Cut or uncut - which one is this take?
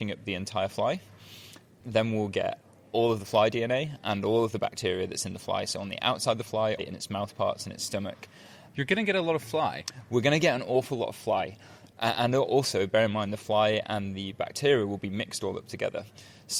cut